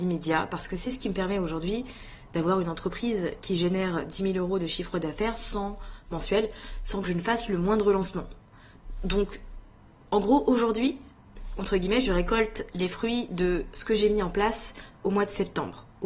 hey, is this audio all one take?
yes; 0 cuts

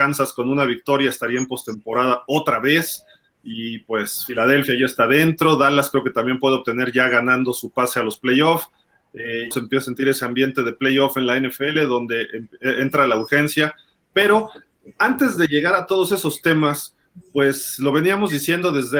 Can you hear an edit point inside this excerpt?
yes; 1 cut; at 9.5 s

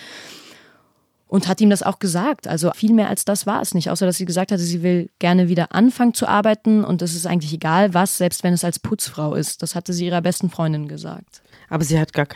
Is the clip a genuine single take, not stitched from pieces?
no; 1 cut; at 2.7 s

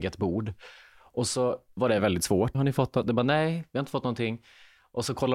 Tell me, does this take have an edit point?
yes; 1 cut; at 2.5 s

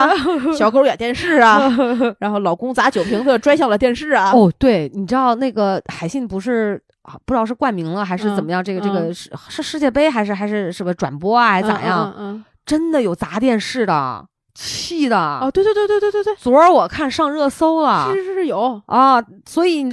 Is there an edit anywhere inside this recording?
no; 0 cuts

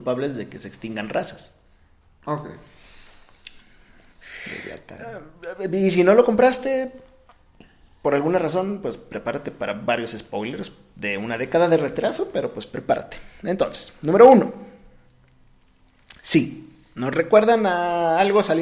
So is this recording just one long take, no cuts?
no; 1 cut; at 2.1 s

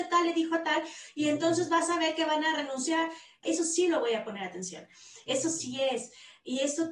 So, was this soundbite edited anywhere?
yes; 1 cut; at 3.4 s

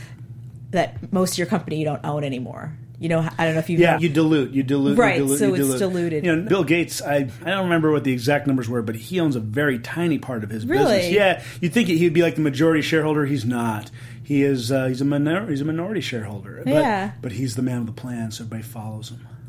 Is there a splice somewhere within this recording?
yes; 2 cuts; at 4.0 s, 6.5 s

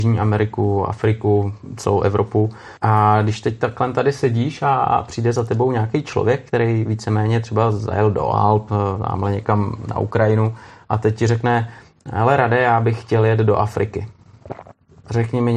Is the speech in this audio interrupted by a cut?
yes; 1 cut; at 2.8 s

